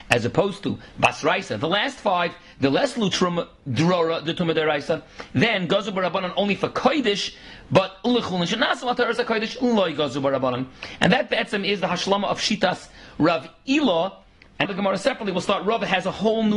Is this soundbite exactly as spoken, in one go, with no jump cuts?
no; 1 cut; at 14.7 s

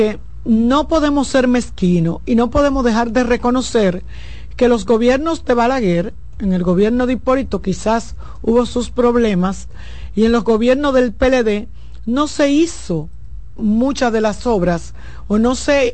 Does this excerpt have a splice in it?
yes; 1 cut; at 13.6 s

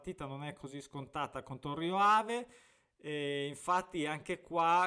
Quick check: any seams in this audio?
no; 0 cuts

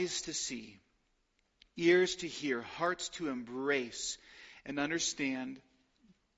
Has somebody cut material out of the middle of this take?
no; 0 cuts

